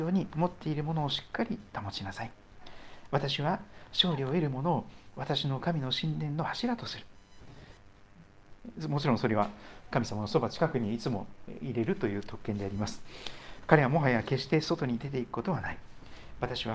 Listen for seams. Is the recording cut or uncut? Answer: uncut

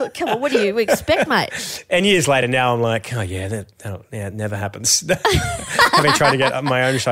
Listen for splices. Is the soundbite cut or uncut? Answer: uncut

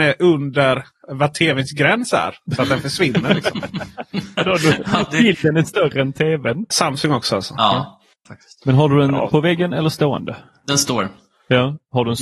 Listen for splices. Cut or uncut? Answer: cut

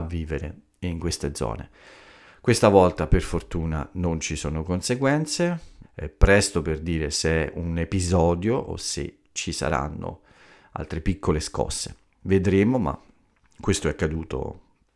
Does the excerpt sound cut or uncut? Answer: cut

